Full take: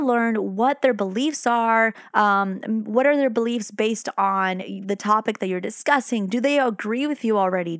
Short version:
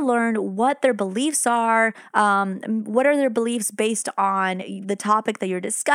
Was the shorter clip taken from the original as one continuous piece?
yes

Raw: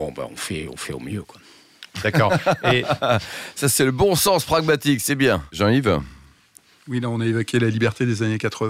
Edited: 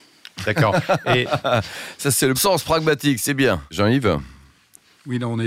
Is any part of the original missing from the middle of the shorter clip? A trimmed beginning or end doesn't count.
yes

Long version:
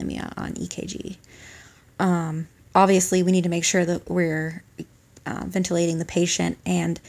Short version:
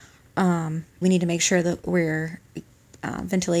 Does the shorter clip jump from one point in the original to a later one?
yes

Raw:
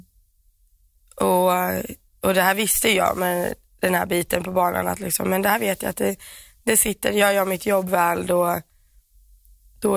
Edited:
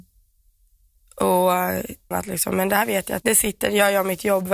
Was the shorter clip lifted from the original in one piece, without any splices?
no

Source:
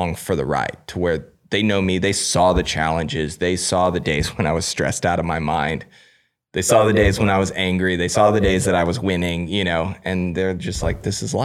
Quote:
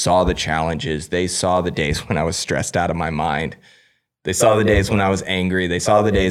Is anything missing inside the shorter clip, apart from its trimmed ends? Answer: no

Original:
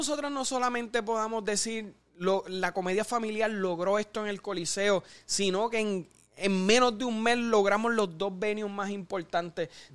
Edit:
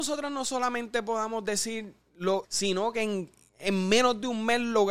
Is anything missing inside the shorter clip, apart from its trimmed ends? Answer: yes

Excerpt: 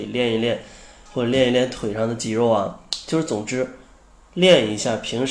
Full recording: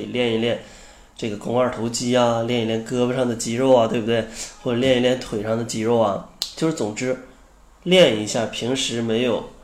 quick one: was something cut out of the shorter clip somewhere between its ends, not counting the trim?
yes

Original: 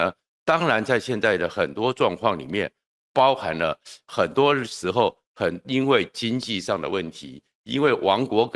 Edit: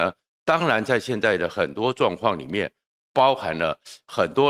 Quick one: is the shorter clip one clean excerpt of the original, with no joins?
yes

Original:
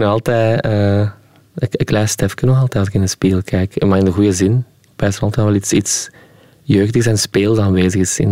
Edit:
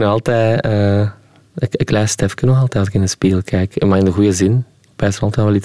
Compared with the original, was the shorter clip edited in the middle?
no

